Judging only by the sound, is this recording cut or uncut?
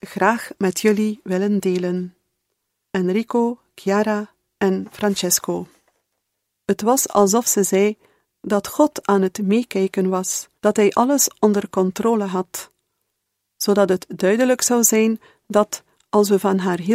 cut